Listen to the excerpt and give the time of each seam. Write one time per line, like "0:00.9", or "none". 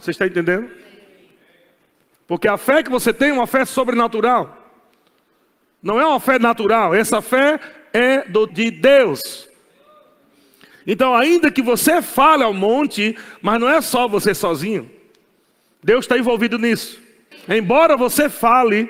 0:08.5
0:17.3

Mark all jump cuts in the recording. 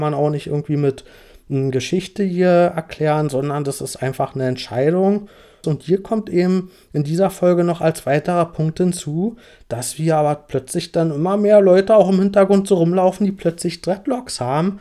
0:05.6

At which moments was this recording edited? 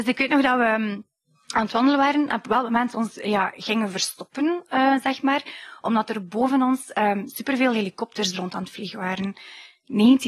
none

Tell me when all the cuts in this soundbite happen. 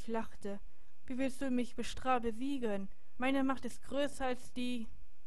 0:03.2

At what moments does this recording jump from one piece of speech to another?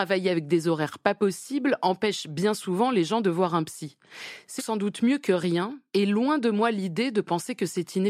0:04.6

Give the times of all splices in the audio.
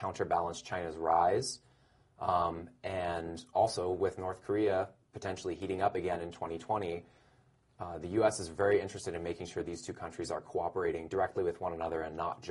none

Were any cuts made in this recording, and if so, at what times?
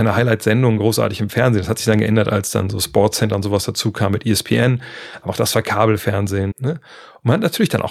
0:06.5

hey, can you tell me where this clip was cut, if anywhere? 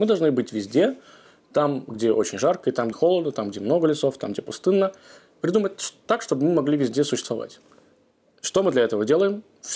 0:02.9

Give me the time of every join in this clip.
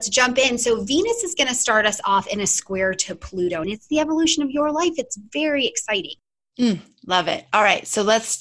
0:03.6

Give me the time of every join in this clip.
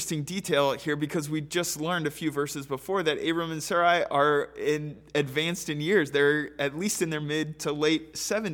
none

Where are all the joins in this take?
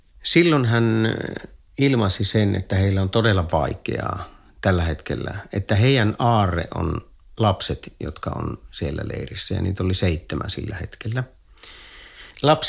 none

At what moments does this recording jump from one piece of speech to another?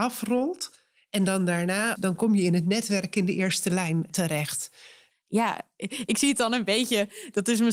0:02.0
0:05.1

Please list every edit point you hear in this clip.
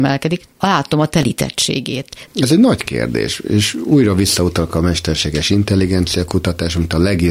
0:02.3

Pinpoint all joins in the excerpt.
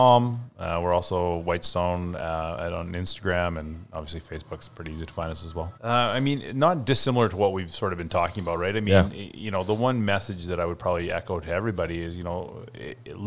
0:05.8

